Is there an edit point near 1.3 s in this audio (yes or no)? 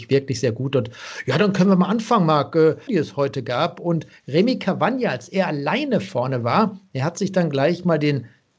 no